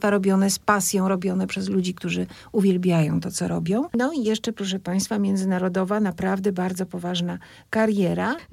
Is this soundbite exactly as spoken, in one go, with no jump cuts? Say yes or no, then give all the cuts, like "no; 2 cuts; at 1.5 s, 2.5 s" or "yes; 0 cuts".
no; 1 cut; at 3.9 s